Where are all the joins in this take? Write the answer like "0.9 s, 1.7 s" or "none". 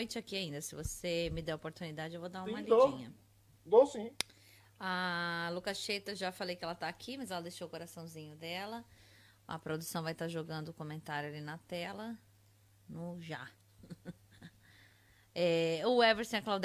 none